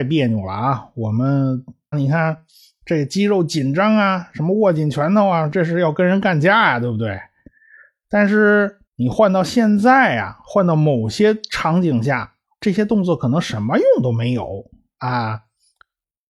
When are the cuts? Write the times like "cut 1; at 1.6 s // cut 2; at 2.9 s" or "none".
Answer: cut 1; at 1.9 s // cut 2; at 8.9 s